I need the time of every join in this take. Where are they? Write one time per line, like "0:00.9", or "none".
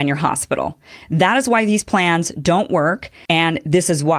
0:03.3